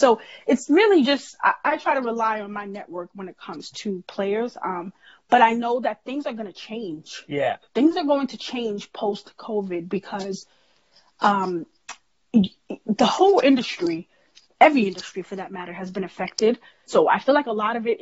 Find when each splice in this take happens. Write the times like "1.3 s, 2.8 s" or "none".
16.9 s